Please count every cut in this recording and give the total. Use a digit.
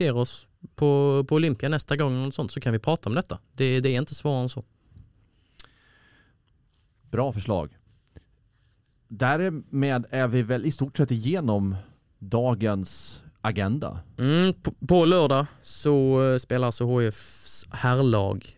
0